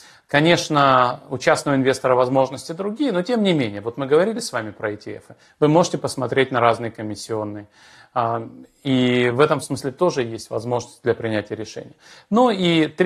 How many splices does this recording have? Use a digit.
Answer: 0